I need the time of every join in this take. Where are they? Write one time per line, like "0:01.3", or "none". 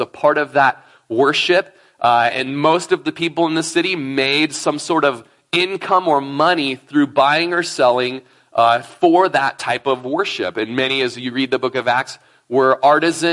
none